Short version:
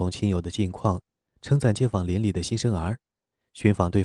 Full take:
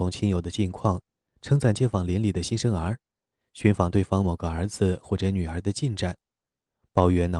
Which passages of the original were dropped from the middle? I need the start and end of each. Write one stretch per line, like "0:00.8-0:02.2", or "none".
none